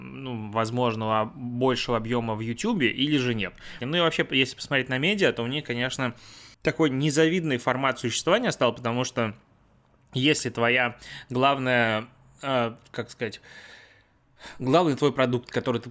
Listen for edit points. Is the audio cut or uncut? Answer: cut